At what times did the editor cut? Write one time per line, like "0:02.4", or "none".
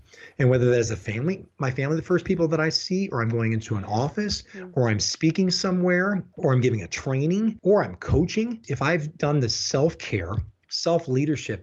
none